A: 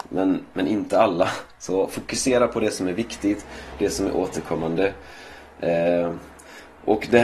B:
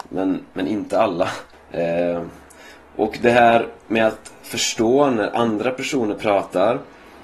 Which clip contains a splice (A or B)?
B